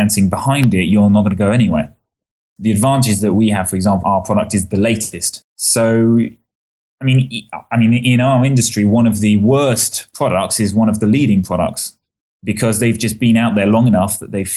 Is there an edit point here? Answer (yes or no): yes